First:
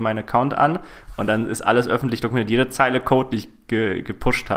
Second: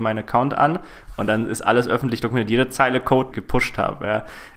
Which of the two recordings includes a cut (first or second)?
second